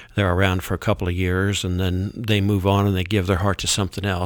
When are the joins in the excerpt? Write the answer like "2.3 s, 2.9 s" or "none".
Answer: none